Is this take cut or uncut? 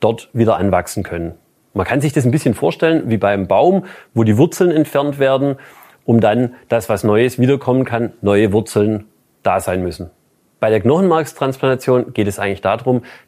uncut